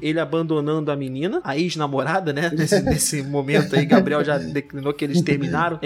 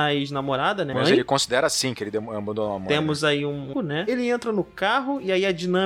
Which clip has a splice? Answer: second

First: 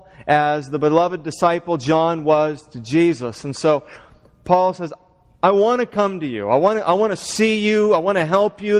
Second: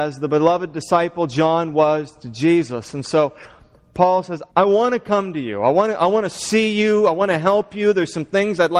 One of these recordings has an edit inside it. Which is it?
second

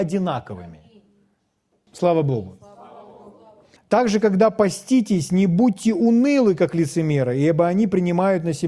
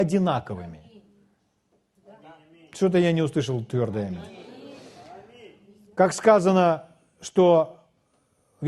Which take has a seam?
first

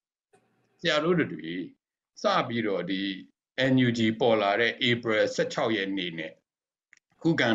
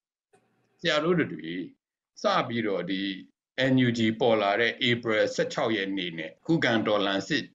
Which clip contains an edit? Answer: second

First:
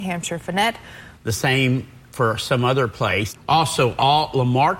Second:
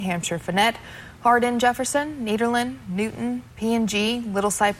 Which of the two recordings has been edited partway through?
first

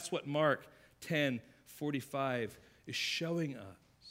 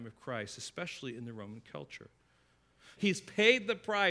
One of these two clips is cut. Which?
second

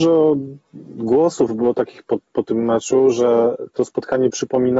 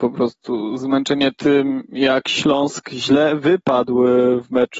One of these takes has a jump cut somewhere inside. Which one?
first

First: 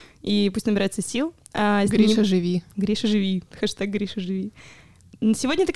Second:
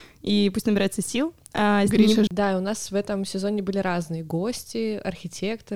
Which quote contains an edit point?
second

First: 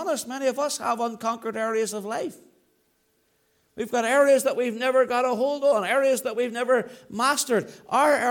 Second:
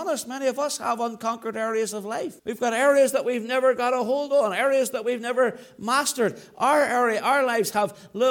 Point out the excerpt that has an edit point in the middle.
second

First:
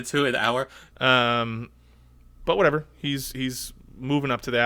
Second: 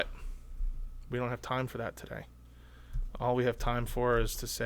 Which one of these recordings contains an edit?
first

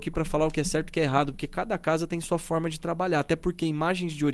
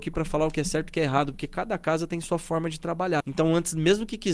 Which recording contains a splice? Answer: second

